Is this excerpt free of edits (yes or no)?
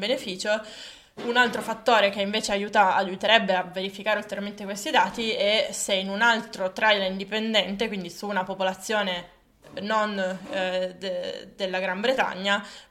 yes